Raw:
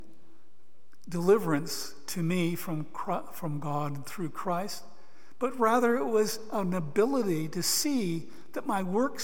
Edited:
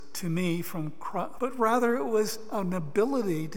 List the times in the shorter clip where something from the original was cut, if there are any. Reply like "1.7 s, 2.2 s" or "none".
1.4 s